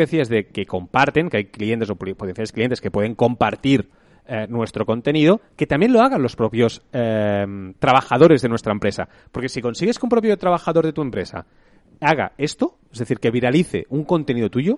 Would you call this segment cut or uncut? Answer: uncut